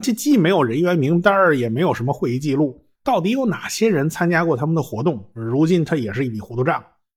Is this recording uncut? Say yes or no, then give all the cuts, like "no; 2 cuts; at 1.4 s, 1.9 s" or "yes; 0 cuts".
no; 1 cut; at 2.9 s